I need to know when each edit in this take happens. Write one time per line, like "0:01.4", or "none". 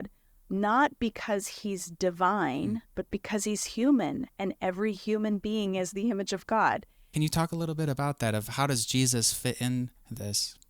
0:02.9
0:07.1